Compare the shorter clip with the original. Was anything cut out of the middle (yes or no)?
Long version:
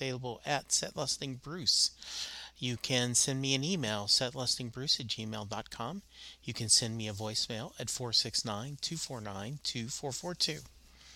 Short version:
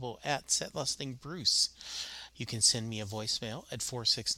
yes